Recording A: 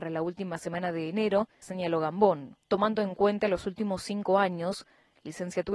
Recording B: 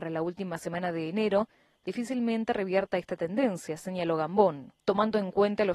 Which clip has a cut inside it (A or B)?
A